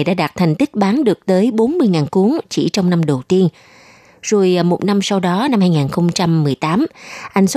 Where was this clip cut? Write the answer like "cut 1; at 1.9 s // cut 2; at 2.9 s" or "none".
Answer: none

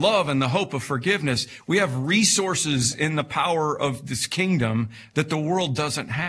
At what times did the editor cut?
cut 1; at 1.6 s

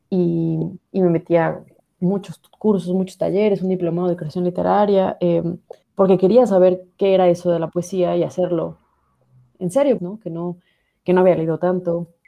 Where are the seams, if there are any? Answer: cut 1; at 5.8 s // cut 2; at 10.0 s

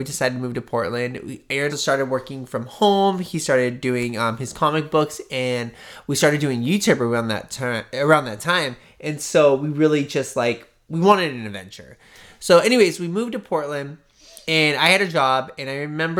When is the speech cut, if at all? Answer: cut 1; at 1.7 s

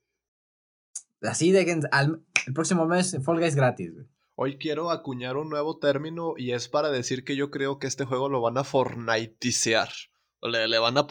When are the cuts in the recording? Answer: none

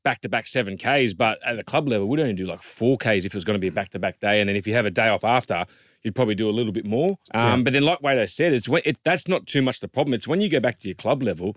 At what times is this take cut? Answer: cut 1; at 7.3 s

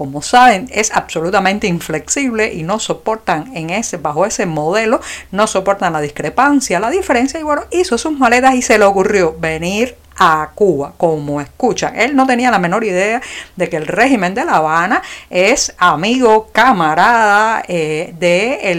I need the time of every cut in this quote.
none

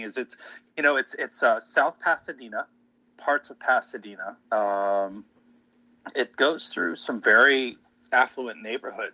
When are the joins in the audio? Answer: cut 1; at 3.0 s // cut 2; at 4.4 s

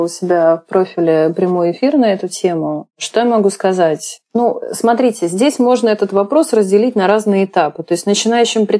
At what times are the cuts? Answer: none

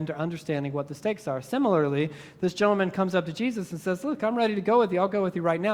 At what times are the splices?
none

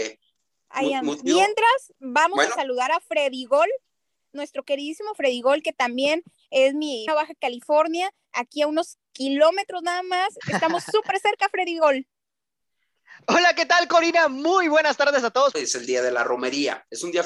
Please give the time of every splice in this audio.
cut 1; at 7.1 s // cut 2; at 15.5 s

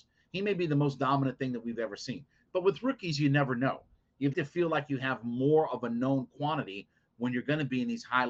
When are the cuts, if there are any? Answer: cut 1; at 4.3 s

